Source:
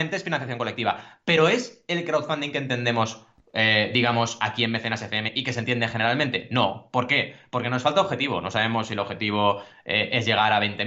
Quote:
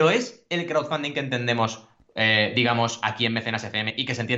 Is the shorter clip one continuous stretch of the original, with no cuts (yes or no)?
yes